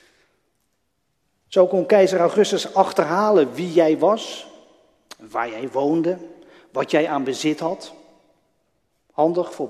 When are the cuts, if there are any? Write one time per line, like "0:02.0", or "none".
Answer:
none